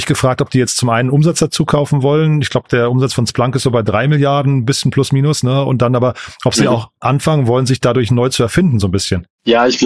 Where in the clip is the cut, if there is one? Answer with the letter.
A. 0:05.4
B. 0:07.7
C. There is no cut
C